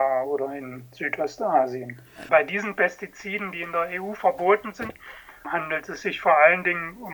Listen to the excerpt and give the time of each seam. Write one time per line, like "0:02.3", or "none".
0:02.3
0:05.4